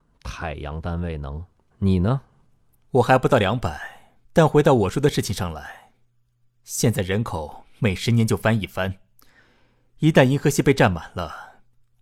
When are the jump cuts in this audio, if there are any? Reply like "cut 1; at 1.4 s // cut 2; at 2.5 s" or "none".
cut 1; at 1.7 s // cut 2; at 4.2 s